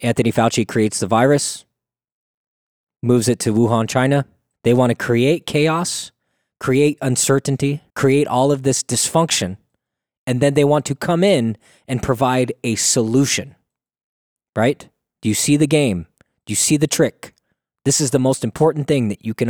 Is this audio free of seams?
no; 2 cuts; at 4.5 s, 7.9 s

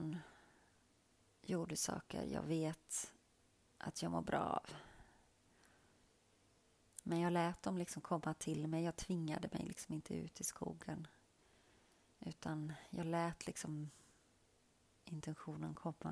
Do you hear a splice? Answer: no; 0 cuts

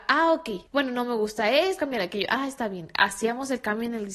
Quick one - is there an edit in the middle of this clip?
yes; 1 cut; at 1.8 s

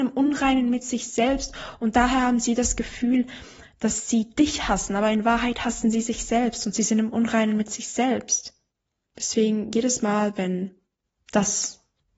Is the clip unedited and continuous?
no; 1 cut; at 9.1 s

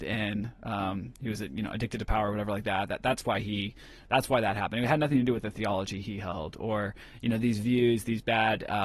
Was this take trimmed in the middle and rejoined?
no; 0 cuts

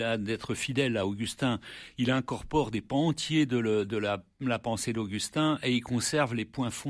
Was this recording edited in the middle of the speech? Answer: no; 0 cuts

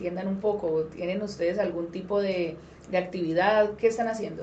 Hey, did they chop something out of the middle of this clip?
no; 0 cuts

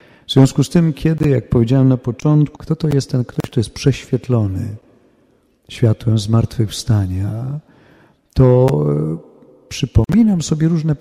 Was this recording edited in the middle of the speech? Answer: yes; 1 cut; at 2.6 s

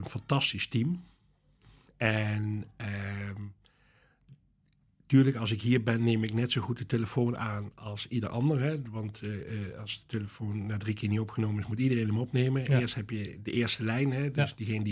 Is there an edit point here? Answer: no; 0 cuts

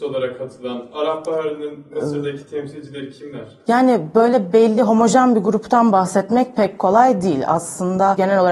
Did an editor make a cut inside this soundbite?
no; 0 cuts

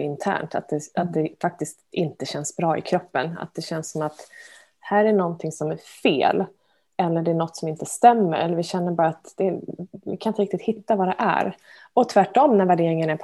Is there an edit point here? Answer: no; 0 cuts

